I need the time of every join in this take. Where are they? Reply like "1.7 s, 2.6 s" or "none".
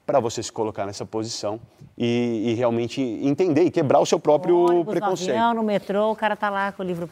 none